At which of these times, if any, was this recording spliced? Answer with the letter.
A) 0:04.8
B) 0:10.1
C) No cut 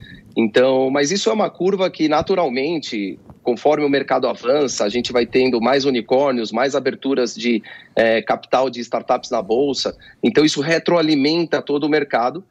B